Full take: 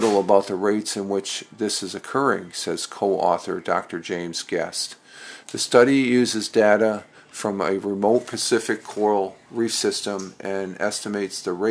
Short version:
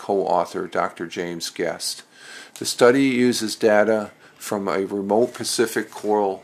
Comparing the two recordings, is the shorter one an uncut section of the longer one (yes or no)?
yes